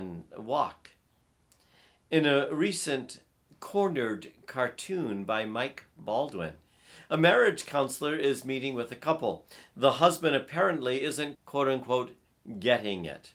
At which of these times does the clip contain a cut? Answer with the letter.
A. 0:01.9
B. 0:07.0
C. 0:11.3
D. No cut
C